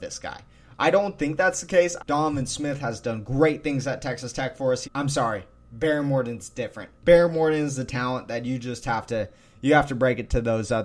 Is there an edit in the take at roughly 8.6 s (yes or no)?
no